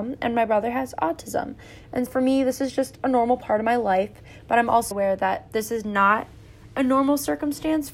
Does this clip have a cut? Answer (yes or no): yes